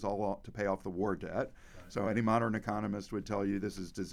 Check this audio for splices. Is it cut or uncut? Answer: uncut